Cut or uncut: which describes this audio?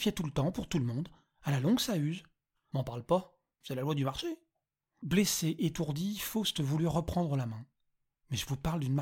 cut